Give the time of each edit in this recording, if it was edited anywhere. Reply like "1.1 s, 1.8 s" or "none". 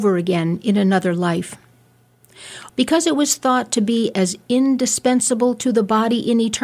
2.7 s